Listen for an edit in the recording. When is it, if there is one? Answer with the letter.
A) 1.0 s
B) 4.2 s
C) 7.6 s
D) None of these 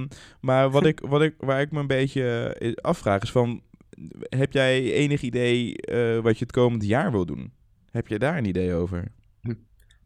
D